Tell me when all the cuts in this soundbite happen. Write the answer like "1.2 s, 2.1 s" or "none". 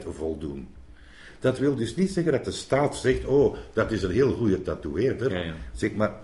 none

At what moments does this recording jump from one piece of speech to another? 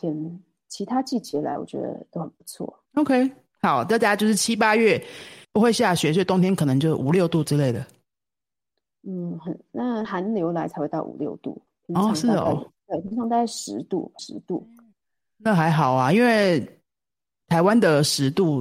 2.9 s, 5.4 s, 14.2 s

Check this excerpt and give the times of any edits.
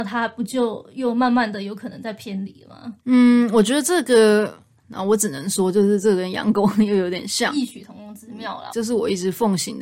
3.0 s, 4.8 s, 8.7 s

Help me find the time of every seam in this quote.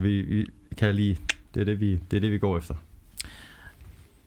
1.5 s

